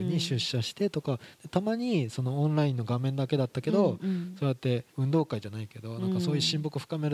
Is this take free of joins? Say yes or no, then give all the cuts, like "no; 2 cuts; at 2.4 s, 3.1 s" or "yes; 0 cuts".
no; 1 cut; at 4.9 s